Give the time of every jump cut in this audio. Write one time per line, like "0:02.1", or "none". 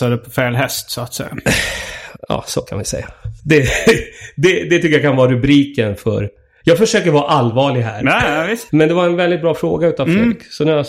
0:03.4
0:08.7